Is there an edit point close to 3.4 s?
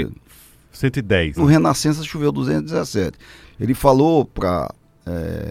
yes; 2 cuts; at 1.4 s, 3.4 s

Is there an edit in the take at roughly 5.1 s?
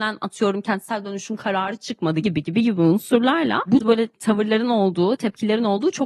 no; 2 cuts; at 2.2 s, 3.8 s

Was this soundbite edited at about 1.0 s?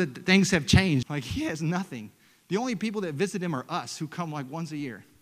yes; 1 cut; at 1.0 s

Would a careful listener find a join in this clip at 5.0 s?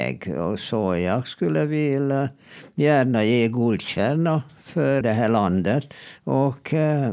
yes; 2 cuts; at 5.0 s, 6.2 s

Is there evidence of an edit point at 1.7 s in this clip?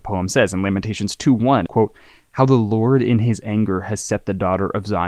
yes; 1 cut; at 1.7 s

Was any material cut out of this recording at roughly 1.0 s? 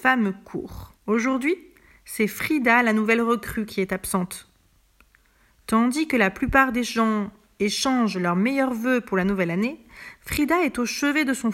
yes; 1 cut; at 1.0 s

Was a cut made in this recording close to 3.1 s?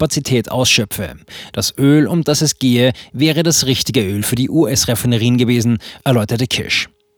no; 1 cut; at 1.5 s

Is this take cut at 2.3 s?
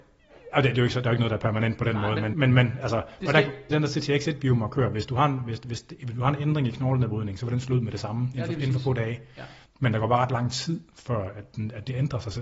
yes; 3 cuts; at 2.3 s, 3.7 s, 9.7 s

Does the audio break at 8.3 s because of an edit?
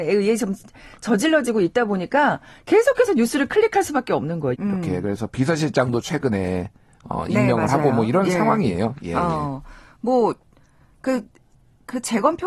no; 1 cut; at 4.5 s

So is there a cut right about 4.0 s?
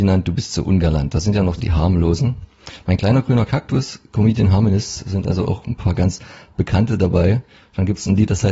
no; 1 cut; at 1.6 s

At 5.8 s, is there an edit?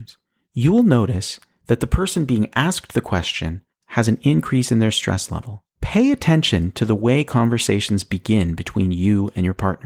yes; 1 cut; at 5.8 s

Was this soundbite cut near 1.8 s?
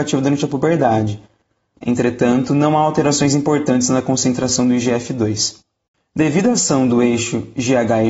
yes; 1 cut; at 1.8 s

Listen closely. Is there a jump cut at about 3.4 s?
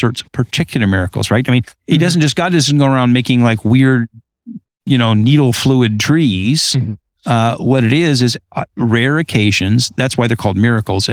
no; 0 cuts

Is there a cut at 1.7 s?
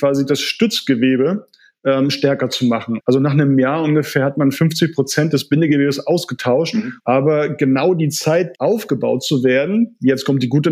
no; 3 cuts; at 3.0 s, 7.0 s, 8.5 s

